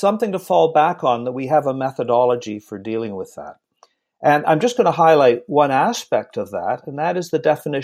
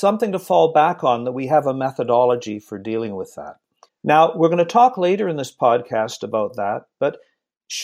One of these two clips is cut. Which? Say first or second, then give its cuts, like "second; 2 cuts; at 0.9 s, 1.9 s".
second; 1 cut; at 3.9 s